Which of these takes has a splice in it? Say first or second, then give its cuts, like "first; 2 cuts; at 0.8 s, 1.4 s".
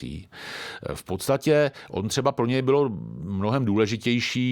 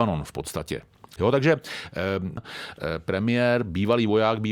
second; 2 cuts; at 1.2 s, 2.4 s